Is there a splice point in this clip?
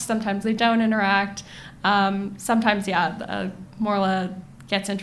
no; 0 cuts

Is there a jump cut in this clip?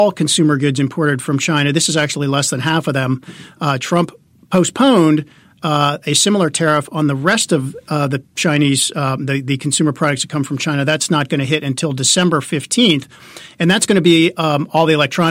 no; 0 cuts

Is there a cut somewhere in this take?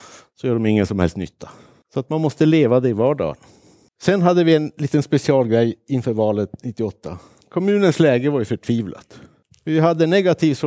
no; 0 cuts

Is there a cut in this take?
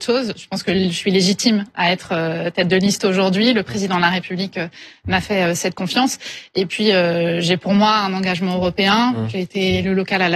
yes; 1 cut; at 1.7 s

